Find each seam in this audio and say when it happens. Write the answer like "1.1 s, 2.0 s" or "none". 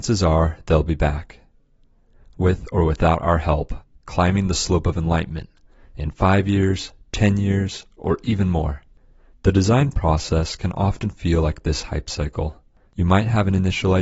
none